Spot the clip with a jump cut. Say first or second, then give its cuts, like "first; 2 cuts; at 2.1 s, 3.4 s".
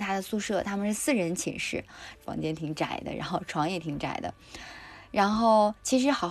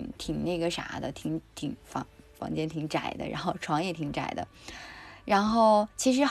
first; 1 cut; at 2.2 s